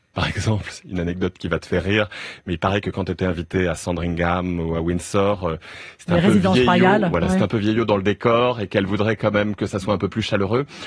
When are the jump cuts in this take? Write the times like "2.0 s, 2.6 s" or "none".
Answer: none